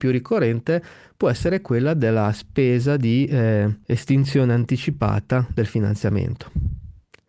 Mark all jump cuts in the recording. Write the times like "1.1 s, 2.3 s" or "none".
none

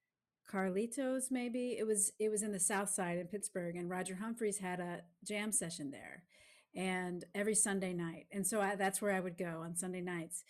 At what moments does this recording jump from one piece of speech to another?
none

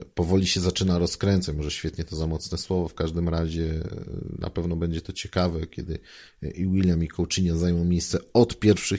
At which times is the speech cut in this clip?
none

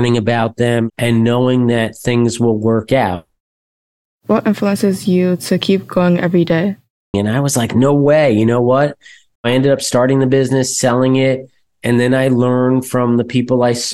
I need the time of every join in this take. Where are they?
4.1 s, 7.1 s, 9.4 s

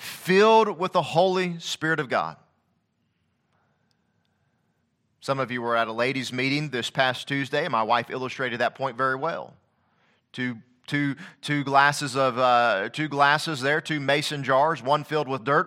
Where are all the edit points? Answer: none

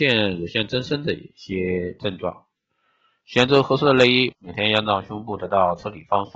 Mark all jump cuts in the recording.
4.3 s

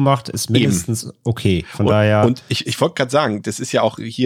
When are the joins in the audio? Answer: none

